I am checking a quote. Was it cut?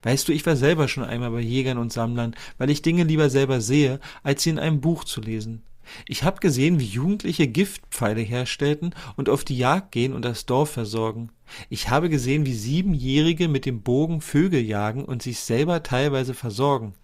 no; 0 cuts

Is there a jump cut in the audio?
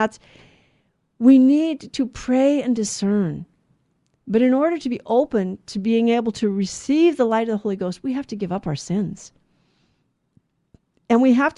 no; 0 cuts

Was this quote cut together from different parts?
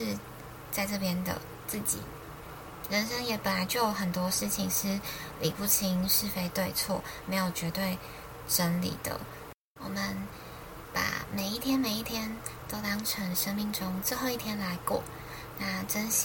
no; 0 cuts

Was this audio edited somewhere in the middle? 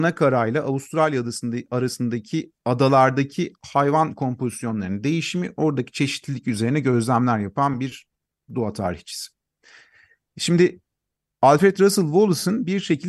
no; 0 cuts

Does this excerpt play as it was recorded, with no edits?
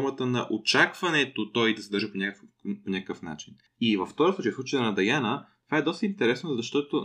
yes; 0 cuts

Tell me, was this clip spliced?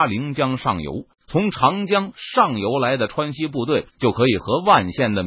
yes; 2 cuts; at 1.1 s, 3.9 s

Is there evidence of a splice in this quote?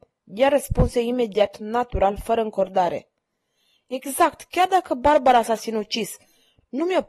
no; 0 cuts

